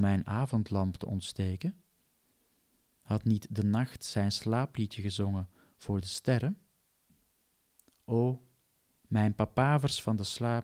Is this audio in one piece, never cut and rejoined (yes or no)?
no